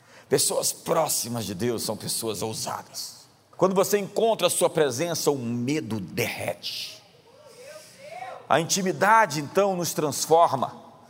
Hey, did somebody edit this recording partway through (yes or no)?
yes